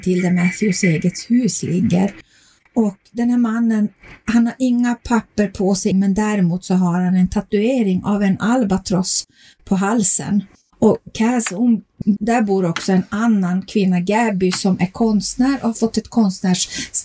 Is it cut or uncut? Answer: cut